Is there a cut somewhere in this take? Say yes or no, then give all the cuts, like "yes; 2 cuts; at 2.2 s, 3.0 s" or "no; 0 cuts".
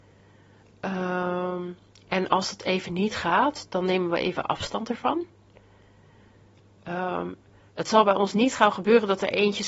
no; 0 cuts